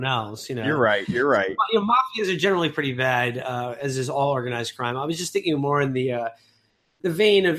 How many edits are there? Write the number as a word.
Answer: zero